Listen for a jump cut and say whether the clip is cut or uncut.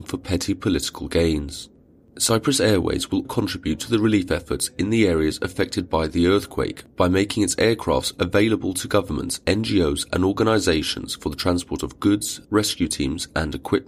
cut